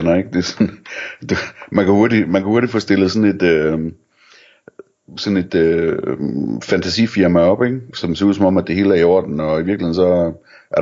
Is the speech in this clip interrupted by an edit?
no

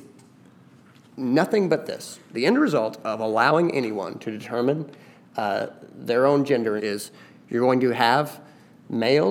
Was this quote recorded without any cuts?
no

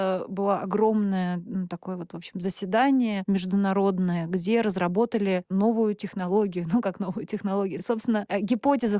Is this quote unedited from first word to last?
yes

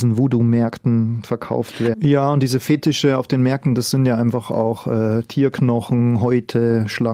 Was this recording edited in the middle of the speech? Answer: yes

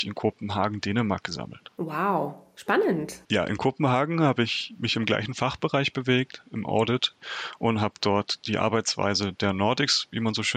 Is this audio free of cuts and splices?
no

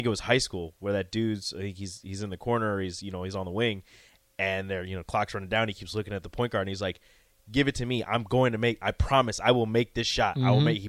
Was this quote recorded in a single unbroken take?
yes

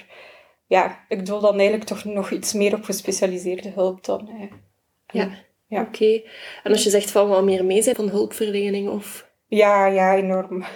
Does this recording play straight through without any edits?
no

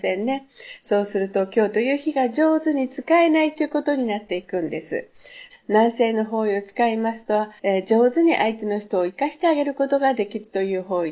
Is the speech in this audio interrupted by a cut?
yes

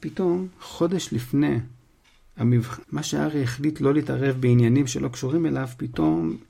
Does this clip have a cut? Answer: yes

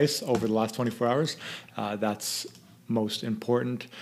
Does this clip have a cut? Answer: yes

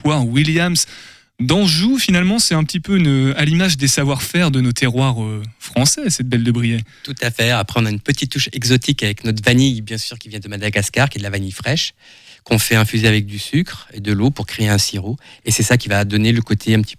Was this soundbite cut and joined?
no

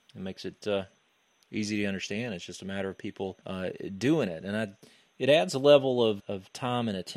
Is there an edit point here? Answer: yes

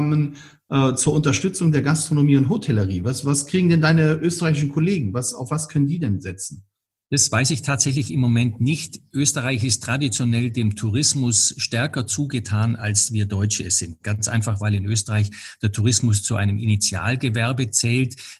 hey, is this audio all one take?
yes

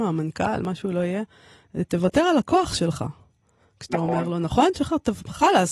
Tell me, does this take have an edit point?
no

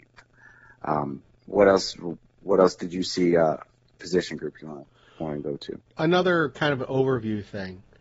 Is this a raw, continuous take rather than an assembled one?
no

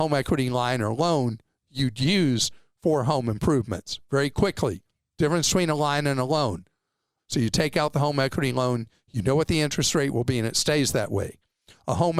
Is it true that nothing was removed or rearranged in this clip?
no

